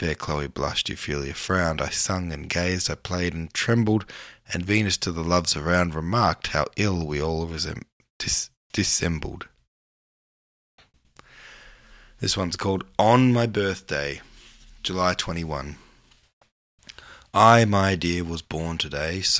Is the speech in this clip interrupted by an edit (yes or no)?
no